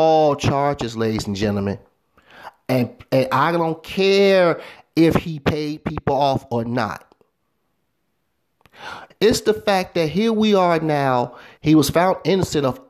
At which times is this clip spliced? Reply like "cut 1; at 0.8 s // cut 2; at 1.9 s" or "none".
cut 1; at 9.1 s // cut 2; at 11.6 s